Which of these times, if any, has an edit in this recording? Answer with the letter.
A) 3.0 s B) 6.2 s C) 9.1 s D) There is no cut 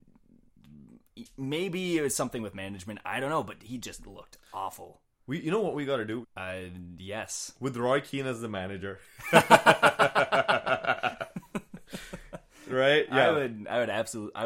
B